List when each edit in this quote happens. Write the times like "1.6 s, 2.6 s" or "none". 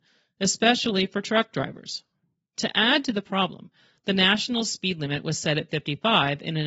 none